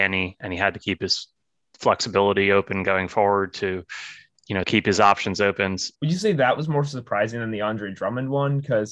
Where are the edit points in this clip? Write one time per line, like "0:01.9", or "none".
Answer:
0:04.6
0:05.9